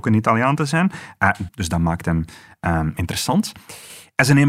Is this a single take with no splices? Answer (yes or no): no